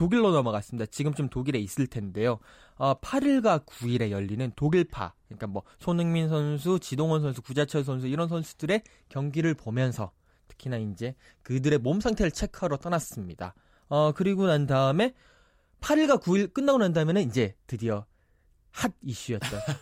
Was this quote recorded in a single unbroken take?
yes; 0 cuts

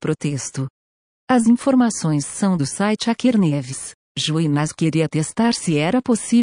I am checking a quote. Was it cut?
yes; 1 cut; at 4.1 s

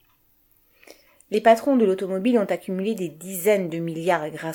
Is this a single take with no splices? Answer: yes; 0 cuts

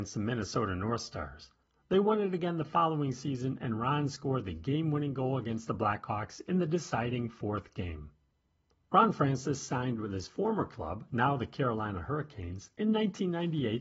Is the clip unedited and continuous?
yes; 0 cuts

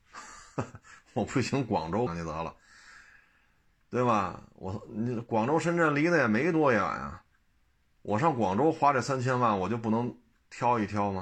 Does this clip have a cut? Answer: yes; 1 cut; at 2.1 s

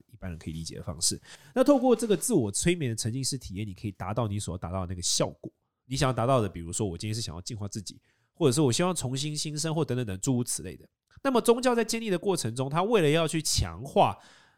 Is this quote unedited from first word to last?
yes; 0 cuts

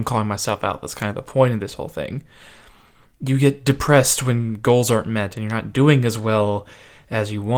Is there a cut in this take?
no; 0 cuts

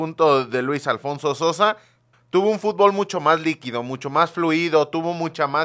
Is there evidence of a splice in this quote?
yes; 1 cut; at 2.1 s

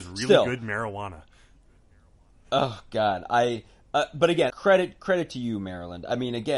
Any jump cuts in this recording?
yes; 1 cut; at 4.5 s

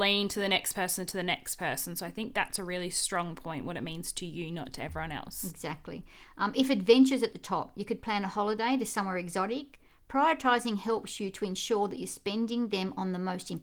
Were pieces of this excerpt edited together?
no; 0 cuts

